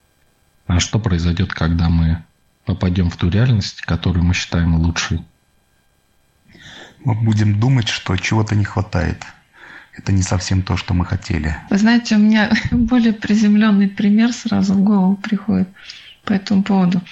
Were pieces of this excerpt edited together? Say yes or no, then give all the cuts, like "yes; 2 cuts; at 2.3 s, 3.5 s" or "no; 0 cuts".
yes; 1 cut; at 11.7 s